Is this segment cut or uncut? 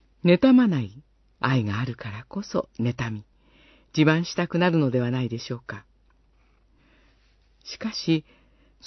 cut